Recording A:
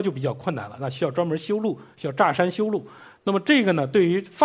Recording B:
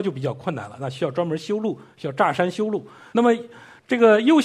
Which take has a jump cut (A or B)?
B